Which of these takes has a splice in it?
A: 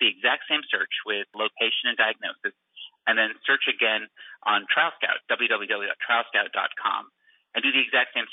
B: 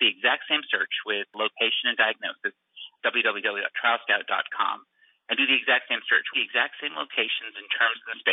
B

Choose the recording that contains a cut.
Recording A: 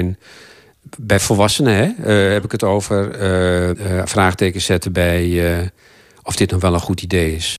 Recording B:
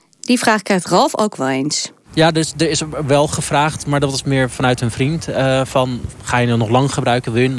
A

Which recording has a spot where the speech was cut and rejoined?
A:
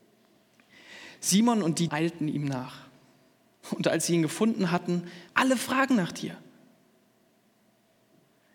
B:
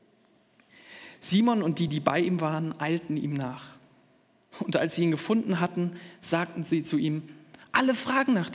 A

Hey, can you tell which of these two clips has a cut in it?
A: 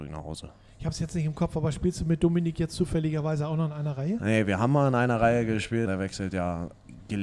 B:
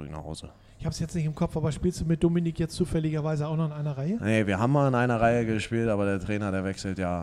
A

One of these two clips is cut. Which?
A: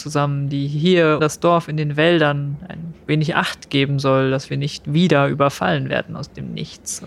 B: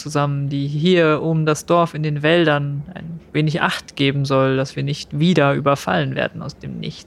A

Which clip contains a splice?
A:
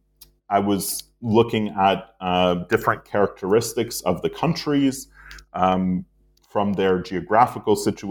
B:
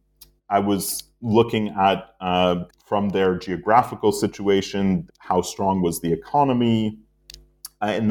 B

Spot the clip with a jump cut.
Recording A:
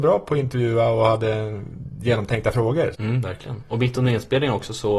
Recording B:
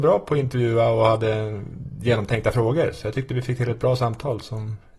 A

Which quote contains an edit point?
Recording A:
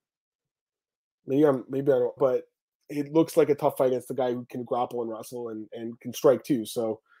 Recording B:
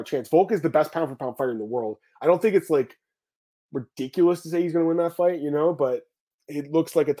A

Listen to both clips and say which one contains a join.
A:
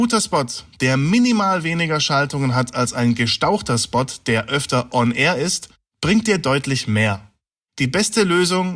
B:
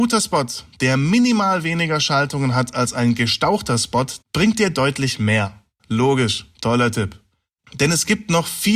B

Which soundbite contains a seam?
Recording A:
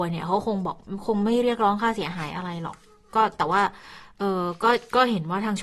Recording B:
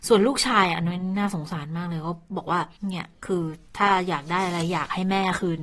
B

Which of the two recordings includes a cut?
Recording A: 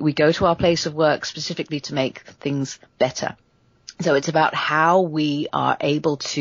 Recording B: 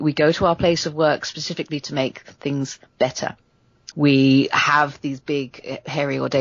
B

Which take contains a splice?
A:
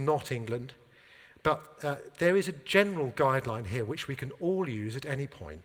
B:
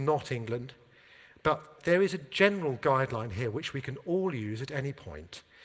B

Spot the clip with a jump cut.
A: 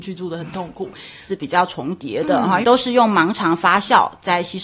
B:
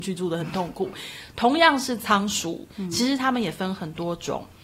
A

